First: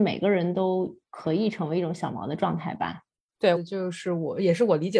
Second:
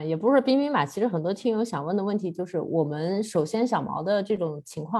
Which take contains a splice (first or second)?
first